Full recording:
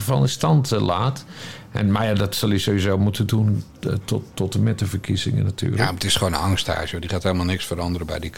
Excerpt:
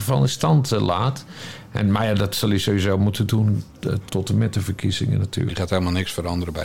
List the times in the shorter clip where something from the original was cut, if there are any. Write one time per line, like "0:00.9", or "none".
0:04.1
0:05.5